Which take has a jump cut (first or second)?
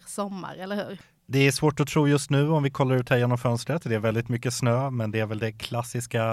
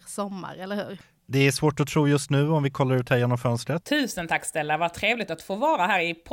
second